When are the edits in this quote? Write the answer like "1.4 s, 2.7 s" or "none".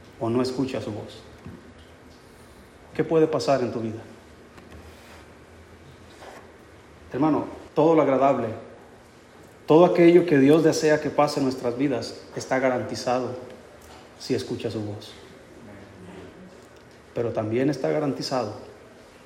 7.7 s